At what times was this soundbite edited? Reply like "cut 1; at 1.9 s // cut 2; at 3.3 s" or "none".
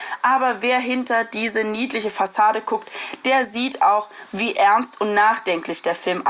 none